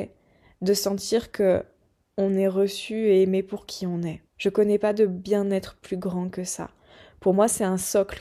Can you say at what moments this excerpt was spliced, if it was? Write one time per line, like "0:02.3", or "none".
0:02.1
0:04.3